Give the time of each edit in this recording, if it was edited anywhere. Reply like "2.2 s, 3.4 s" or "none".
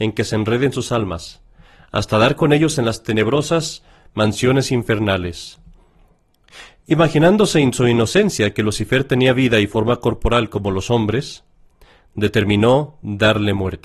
none

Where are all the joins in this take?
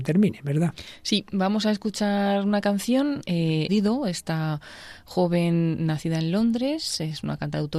3.7 s

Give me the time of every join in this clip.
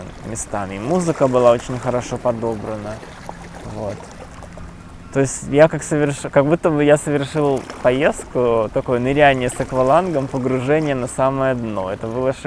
none

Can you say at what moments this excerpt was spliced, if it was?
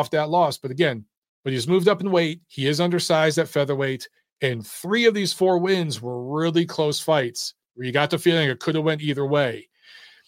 1.3 s

